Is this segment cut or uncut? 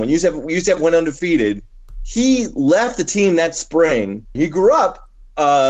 cut